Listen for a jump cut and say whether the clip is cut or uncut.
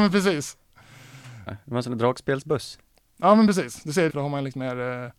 cut